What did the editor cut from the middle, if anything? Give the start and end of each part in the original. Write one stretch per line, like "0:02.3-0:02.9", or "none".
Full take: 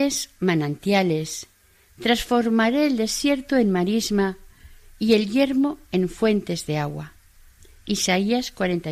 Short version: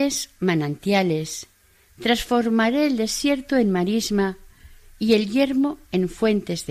none